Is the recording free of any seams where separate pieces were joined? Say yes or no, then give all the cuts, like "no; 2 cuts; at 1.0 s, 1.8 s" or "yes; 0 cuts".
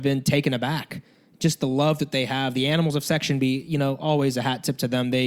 yes; 0 cuts